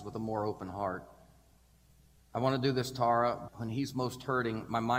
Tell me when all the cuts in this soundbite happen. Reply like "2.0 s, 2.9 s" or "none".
2.2 s, 3.5 s